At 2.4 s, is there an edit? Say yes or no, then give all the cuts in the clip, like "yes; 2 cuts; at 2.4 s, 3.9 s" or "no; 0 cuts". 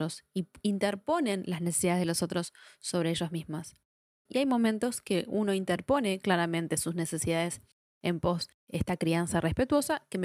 no; 2 cuts; at 4.3 s, 8.6 s